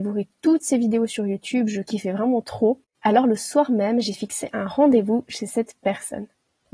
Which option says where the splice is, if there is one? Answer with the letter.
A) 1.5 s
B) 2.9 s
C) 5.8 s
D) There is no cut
B